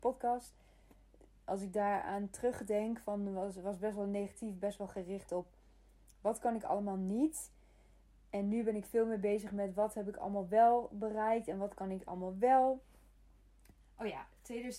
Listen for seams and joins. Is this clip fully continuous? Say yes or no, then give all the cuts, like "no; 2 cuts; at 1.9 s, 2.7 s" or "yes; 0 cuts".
no; 1 cut; at 13.8 s